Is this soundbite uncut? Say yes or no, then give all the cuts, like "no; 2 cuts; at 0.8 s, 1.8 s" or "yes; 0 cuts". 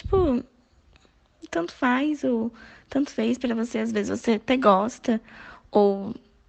yes; 0 cuts